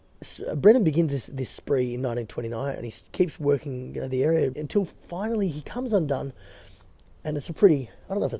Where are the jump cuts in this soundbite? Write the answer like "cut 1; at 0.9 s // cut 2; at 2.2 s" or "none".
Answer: cut 1; at 4.5 s